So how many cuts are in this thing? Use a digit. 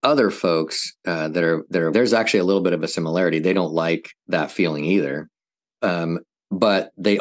1